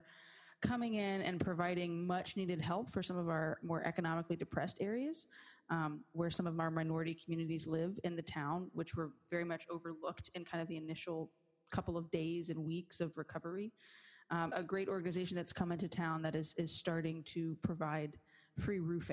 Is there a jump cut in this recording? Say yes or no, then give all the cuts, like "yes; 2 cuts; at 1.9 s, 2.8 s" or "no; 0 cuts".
yes; 1 cut; at 14.5 s